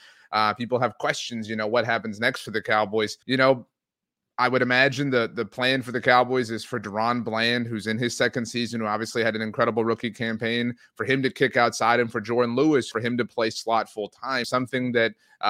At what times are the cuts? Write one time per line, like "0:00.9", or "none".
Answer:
0:03.2
0:12.9
0:14.4